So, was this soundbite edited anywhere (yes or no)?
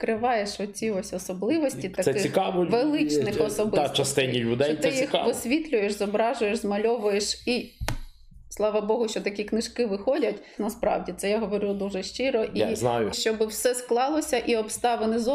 yes